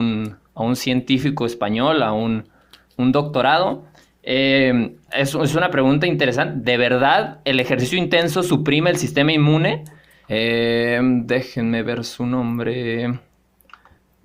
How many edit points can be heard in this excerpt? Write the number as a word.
two